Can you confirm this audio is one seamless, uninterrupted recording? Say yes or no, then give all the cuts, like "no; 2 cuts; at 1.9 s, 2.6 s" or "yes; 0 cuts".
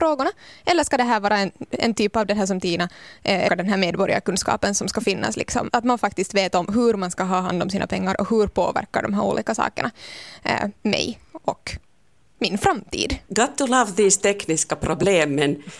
no; 3 cuts; at 3.5 s, 5.7 s, 13.3 s